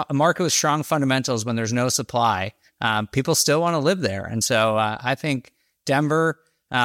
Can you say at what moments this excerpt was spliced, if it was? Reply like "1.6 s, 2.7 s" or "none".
none